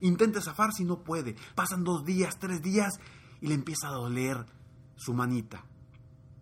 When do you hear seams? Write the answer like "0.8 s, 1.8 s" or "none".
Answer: 1.5 s

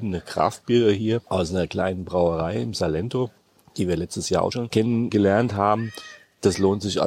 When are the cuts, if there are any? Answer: none

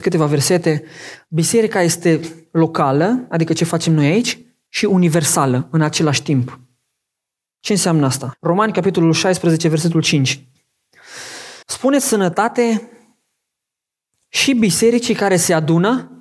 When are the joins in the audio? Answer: 8.3 s, 11.6 s

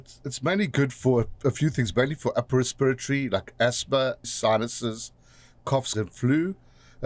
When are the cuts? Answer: 4.2 s, 5.9 s

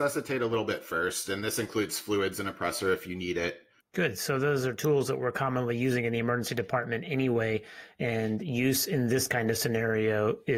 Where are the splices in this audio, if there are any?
3.8 s

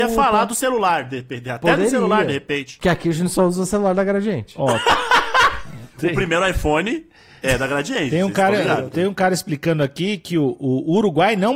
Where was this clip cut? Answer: 2.8 s

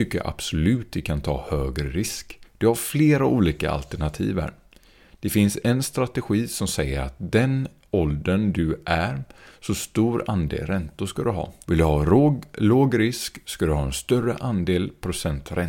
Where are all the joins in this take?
2.5 s, 11.6 s

